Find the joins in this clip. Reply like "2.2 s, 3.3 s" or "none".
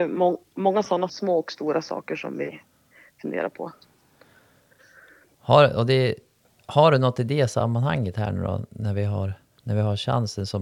1.1 s